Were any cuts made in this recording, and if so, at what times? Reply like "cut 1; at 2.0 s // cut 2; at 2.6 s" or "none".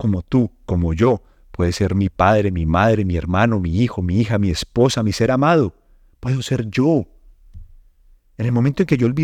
none